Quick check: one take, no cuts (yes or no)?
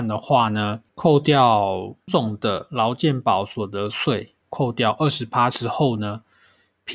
no